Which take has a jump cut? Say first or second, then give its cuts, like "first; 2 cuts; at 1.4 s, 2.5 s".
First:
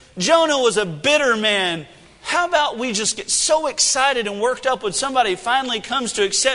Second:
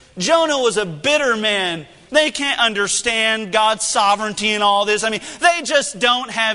second; 1 cut; at 2.1 s